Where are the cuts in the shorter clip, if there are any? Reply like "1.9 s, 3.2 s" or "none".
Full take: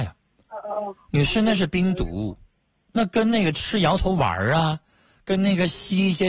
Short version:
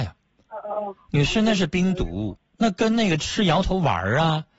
2.4 s